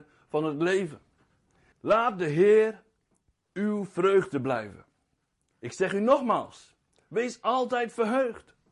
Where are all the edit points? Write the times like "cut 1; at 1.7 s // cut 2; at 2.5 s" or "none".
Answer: cut 1; at 1.7 s